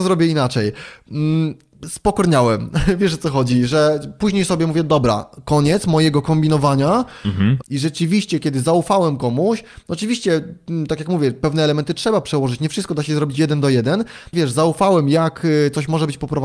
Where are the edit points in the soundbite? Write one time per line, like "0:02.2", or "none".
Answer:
0:07.6
0:14.3